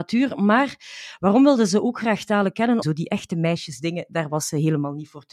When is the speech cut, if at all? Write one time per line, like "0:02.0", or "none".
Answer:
0:02.8